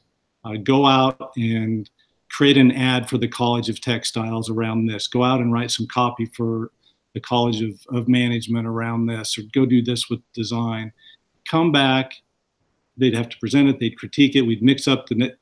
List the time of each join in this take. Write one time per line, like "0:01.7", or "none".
0:12.9